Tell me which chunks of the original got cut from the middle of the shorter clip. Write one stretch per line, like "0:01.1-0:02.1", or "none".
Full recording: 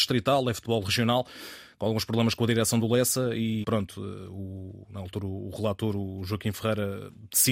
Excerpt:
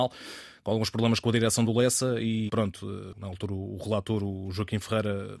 0:04.3-0:04.9